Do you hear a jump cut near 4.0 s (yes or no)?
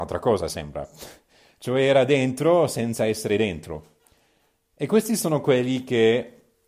no